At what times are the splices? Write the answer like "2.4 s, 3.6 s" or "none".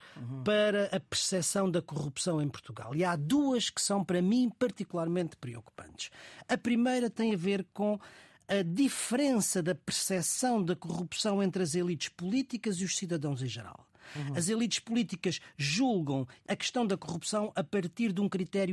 none